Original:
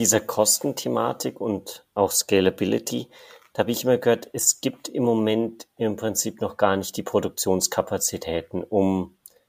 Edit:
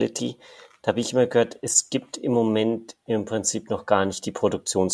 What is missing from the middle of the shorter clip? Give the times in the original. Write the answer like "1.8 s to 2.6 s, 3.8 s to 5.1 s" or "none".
none